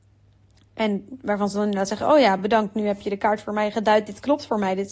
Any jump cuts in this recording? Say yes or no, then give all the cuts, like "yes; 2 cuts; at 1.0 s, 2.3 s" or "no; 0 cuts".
no; 0 cuts